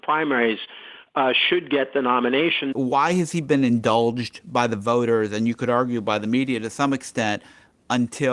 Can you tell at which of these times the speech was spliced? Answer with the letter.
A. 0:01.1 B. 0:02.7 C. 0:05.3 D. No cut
B